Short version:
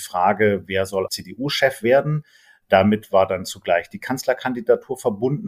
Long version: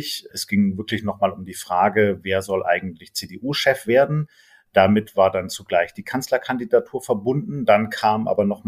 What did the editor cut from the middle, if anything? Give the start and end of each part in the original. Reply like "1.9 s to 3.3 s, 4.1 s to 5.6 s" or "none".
2.6 s to 3.1 s